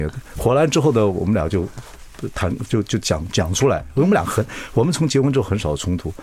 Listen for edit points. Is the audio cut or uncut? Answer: uncut